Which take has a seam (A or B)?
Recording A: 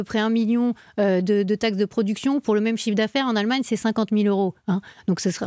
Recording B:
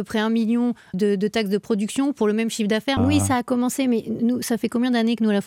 B